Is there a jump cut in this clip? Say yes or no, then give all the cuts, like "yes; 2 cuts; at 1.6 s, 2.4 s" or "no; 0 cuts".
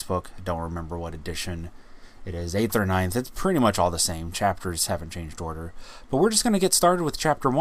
no; 0 cuts